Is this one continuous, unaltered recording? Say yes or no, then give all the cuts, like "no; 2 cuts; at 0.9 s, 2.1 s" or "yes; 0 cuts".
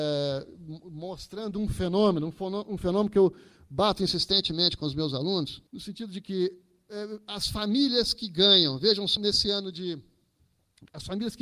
no; 2 cuts; at 5.7 s, 9.2 s